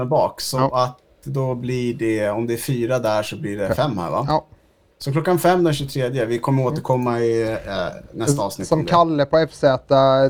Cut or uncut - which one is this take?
cut